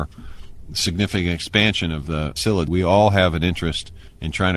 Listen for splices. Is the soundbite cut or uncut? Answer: cut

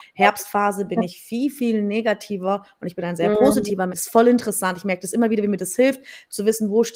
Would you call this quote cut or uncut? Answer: cut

